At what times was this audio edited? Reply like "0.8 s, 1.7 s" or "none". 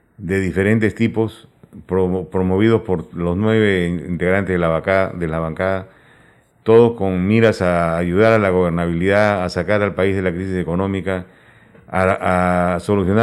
none